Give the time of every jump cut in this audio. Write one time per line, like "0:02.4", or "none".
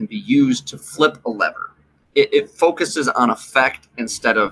0:02.1